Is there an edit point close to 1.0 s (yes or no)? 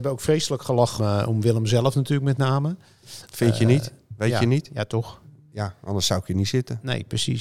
yes